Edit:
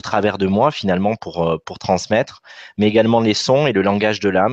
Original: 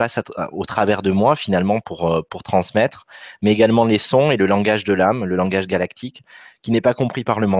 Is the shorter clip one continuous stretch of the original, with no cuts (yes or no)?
yes